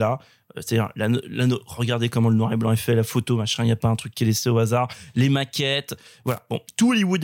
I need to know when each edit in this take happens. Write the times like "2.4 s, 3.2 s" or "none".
none